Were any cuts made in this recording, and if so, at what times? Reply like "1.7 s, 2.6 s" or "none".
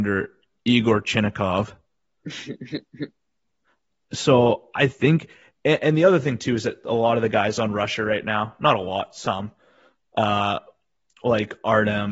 none